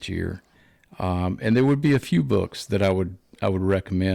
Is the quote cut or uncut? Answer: uncut